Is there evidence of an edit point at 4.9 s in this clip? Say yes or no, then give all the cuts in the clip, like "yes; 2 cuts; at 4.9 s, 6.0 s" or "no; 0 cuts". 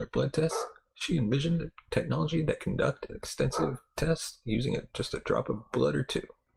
no; 0 cuts